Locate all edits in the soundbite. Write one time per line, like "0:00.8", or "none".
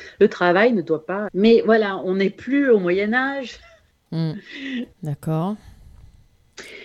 0:01.3
0:04.9